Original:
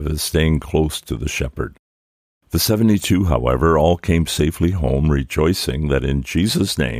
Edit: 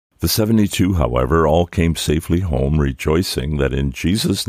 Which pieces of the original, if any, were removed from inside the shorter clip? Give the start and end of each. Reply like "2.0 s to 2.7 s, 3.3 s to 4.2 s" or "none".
none